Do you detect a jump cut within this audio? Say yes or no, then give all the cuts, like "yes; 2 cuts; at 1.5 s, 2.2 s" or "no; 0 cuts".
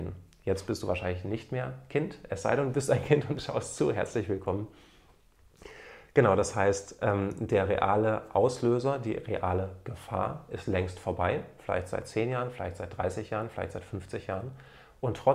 no; 0 cuts